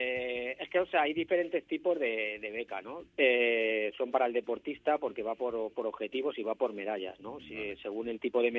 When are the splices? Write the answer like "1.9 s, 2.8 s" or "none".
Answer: 3.1 s